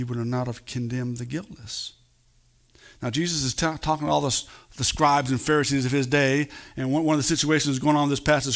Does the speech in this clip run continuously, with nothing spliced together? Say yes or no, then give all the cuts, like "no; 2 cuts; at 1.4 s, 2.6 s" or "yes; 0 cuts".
yes; 0 cuts